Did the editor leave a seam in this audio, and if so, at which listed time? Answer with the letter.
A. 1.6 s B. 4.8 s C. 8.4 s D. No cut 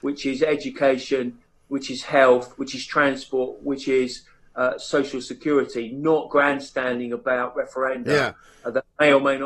D